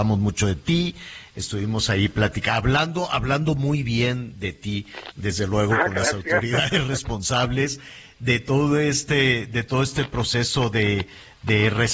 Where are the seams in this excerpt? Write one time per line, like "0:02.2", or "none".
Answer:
none